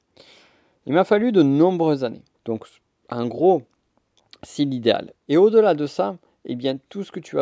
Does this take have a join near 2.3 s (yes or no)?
yes